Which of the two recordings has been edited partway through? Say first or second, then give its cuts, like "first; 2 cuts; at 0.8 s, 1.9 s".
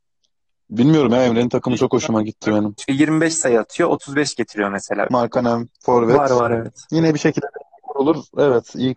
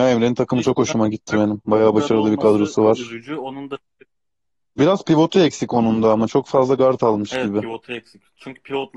first; 2 cuts; at 2.8 s, 5.1 s